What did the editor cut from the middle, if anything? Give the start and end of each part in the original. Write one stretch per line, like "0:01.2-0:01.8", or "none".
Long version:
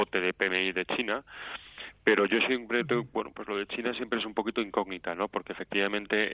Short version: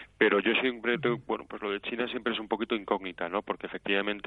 none